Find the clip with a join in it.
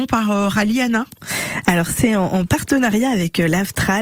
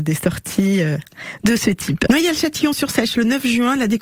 second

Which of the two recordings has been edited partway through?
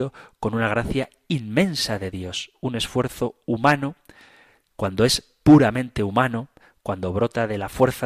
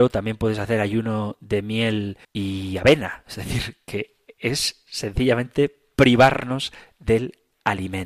second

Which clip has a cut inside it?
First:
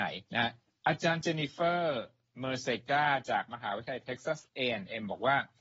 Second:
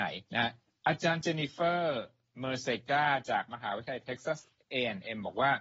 first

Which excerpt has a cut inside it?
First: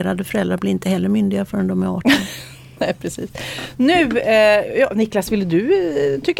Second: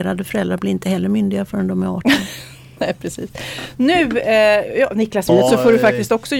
second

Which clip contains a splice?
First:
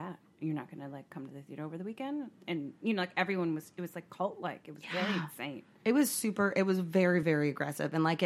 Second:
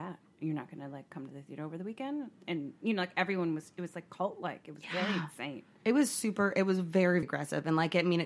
second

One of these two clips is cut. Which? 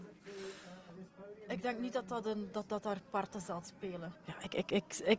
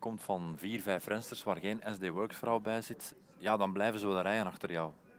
first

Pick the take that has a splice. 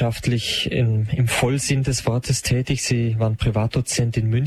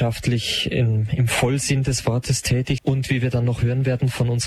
second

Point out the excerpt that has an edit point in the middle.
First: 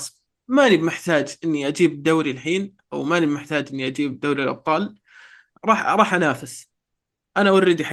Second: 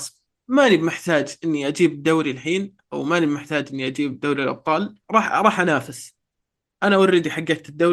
second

